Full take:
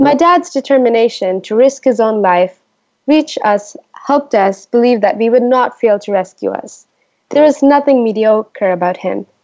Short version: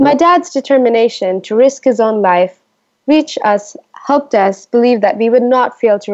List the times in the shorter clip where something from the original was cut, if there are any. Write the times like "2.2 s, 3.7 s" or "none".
none